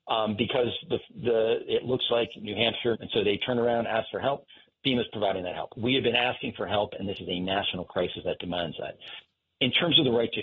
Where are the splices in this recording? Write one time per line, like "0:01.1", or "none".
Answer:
0:02.9